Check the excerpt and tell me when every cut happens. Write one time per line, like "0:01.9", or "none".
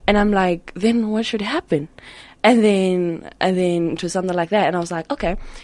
none